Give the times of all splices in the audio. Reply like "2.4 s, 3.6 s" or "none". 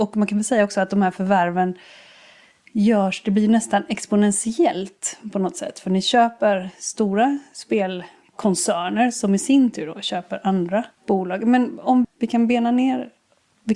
11.0 s, 12.0 s

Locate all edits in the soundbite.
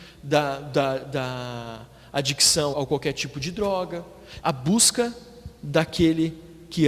2.7 s, 4.4 s

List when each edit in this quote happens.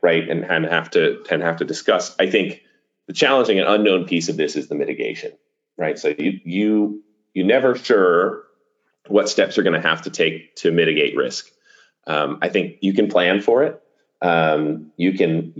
none

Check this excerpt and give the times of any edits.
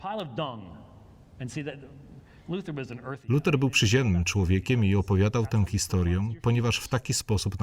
none

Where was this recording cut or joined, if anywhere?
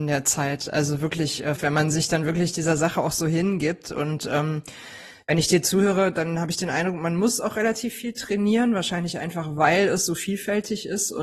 1.6 s

